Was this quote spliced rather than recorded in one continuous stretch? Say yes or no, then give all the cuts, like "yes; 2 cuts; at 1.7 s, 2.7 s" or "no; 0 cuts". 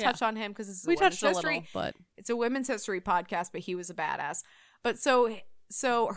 no; 0 cuts